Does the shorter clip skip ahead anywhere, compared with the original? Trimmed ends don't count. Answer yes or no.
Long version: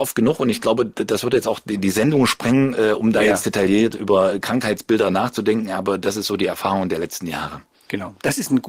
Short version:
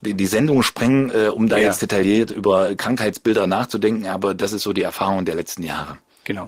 no